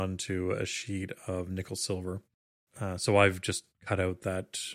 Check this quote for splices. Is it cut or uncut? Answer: uncut